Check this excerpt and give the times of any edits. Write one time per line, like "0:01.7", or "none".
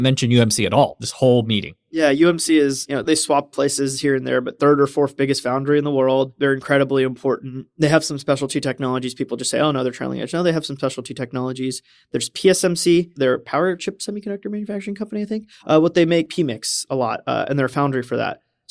none

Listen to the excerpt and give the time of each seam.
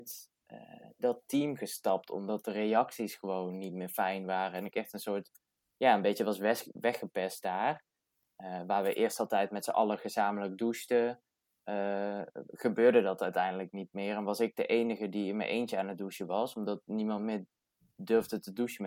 none

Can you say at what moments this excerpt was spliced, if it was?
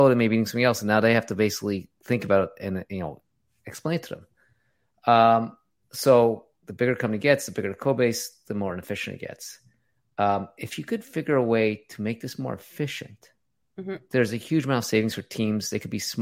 none

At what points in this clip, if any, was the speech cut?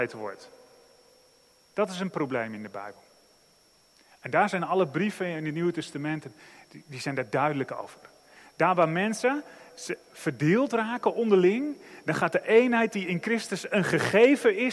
none

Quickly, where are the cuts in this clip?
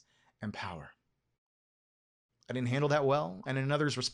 0:02.3

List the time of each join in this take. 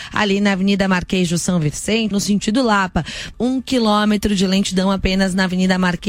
0:02.1
0:03.3

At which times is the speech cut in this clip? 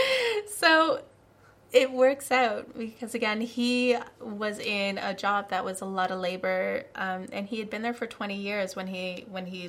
none

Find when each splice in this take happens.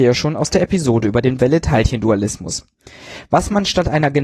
none

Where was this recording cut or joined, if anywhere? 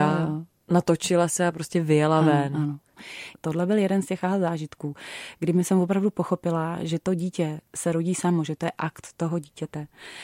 0:07.7

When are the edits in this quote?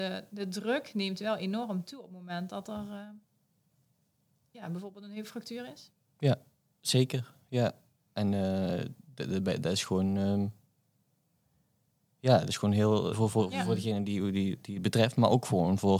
0:13.1

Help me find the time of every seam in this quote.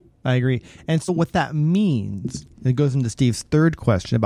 none

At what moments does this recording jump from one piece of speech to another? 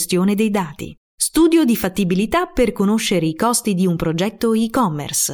0:01.0

